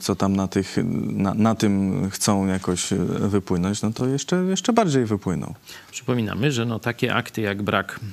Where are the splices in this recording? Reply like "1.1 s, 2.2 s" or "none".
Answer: none